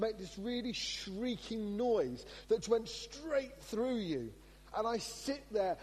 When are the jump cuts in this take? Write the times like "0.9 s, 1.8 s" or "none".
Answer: 2.6 s, 4.7 s